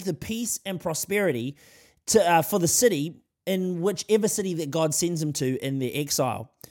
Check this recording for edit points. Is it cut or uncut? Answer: uncut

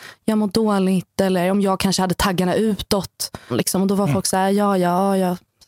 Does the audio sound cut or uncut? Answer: cut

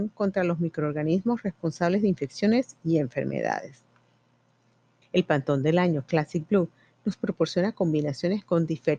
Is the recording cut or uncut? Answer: cut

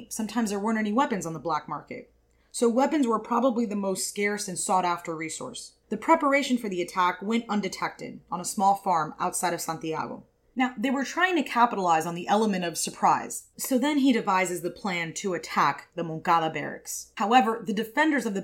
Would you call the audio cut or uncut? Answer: cut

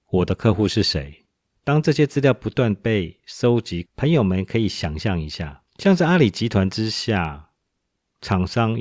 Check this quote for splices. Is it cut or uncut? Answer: cut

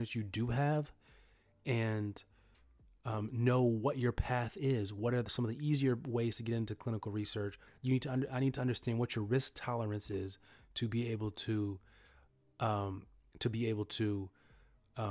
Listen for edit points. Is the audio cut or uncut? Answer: cut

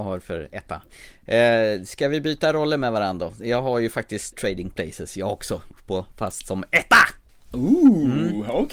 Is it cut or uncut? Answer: cut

